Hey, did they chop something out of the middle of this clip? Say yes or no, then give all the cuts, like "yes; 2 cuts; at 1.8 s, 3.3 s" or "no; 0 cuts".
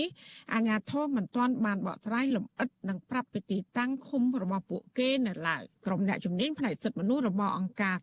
yes; 1 cut; at 5.7 s